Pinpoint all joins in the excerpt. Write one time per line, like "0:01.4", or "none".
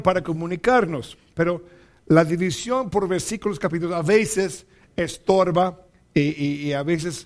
none